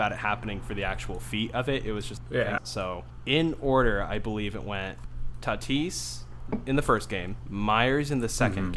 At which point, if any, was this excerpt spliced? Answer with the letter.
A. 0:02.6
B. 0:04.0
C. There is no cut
A